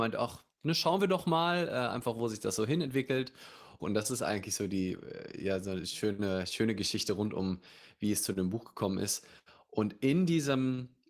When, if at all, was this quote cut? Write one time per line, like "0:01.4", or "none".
0:03.8